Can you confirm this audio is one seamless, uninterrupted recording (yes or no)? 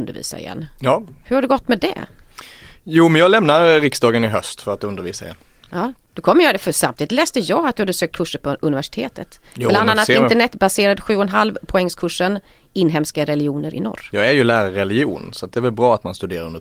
yes